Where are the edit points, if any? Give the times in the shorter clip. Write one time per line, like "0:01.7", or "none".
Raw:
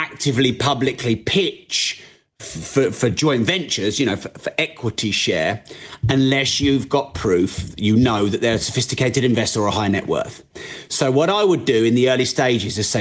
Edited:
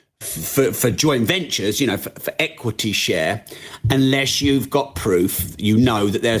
none

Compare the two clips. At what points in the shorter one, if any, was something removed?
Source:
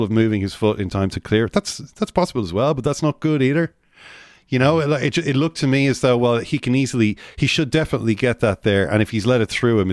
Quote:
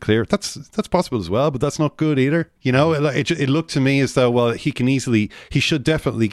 0:02.6

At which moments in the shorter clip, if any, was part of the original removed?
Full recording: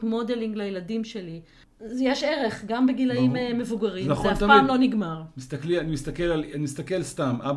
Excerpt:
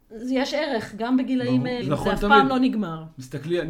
0:01.8

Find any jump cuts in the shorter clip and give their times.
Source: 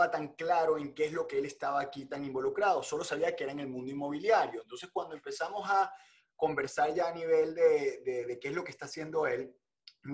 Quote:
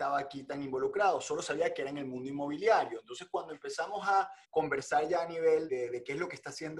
0:04.4
0:05.7

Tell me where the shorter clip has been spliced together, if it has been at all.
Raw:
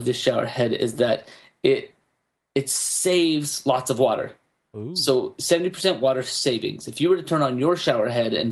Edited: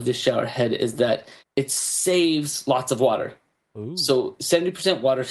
0:01.4

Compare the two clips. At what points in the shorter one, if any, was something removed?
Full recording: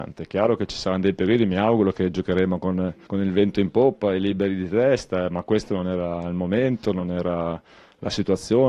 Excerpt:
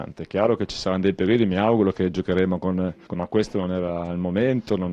0:03.1

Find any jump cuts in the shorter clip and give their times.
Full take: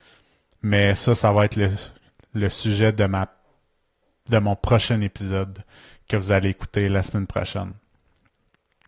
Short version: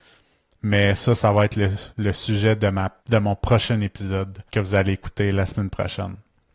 0:01.9
0:03.0
0:04.5

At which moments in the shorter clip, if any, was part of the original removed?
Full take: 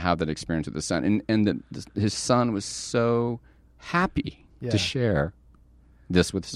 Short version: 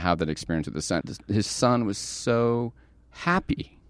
0:01.0

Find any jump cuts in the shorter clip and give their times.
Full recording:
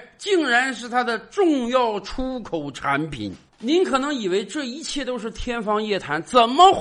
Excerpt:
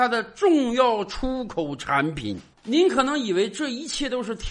none

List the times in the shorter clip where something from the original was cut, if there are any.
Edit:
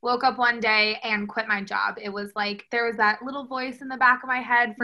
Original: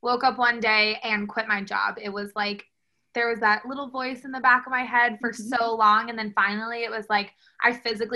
0:02.7

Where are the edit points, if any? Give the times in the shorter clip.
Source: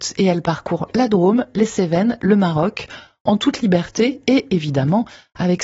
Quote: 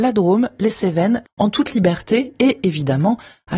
0:01.2

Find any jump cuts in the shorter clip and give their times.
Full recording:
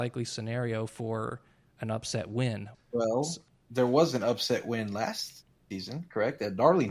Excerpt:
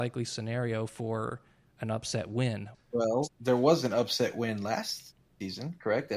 0:03.2

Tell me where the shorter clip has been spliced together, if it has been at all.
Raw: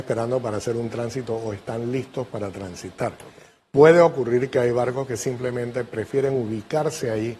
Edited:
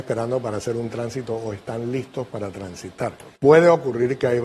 0:03.4

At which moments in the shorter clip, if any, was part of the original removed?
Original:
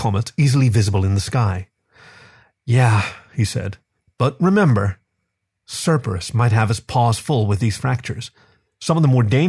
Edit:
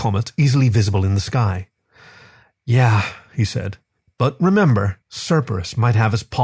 0:05.0

